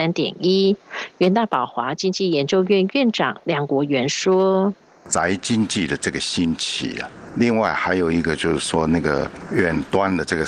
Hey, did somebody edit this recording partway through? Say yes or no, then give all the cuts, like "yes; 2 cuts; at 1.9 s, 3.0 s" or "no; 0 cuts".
no; 0 cuts